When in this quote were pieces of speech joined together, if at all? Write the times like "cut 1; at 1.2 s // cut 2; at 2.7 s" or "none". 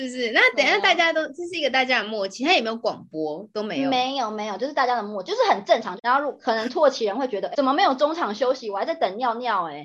cut 1; at 6.0 s // cut 2; at 7.5 s